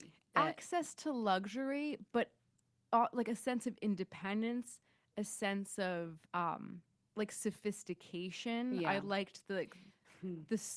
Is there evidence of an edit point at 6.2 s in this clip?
yes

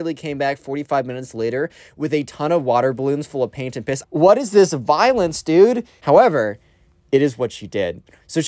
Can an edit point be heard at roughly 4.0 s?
yes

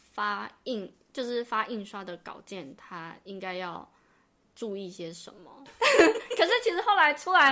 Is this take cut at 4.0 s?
no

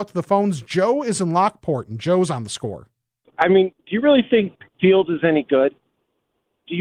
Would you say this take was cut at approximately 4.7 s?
yes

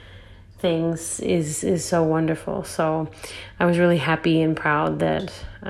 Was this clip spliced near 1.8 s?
no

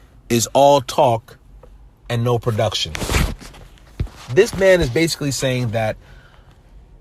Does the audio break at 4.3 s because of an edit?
no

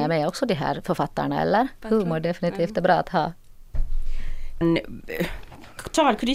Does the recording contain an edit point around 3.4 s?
no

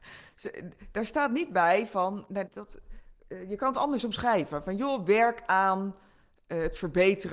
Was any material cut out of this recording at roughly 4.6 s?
no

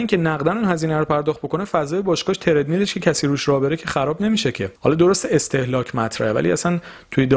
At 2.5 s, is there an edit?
no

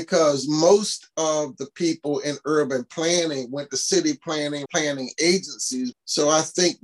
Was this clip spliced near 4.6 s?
yes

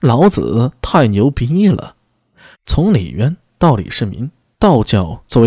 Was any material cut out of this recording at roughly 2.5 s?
yes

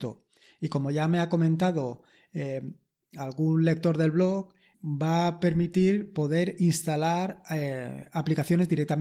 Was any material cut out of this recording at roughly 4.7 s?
yes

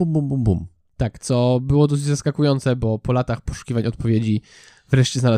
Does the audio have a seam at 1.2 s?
no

